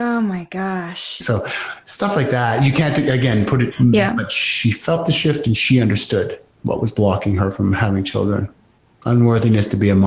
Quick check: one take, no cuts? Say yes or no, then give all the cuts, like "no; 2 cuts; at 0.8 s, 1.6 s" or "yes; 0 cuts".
no; 2 cuts; at 1.2 s, 3.7 s